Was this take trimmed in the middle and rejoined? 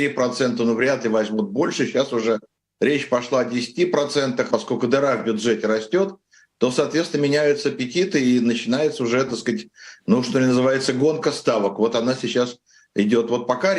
yes; 1 cut; at 4.5 s

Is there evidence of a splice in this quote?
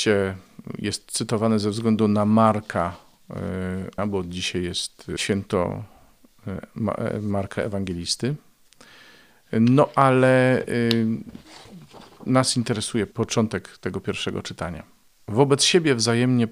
yes; 1 cut; at 4.0 s

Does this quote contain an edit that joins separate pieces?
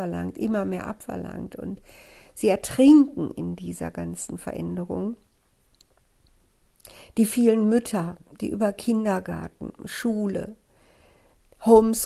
no; 0 cuts

